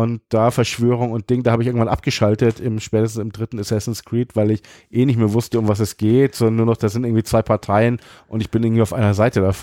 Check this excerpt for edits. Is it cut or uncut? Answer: uncut